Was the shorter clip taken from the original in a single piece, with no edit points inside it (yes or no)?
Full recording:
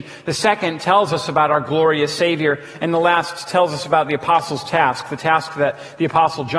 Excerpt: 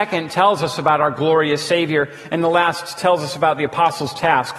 yes